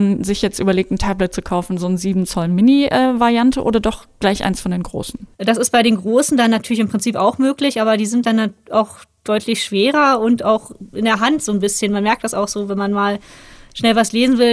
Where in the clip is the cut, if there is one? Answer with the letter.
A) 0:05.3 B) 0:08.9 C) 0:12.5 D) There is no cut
A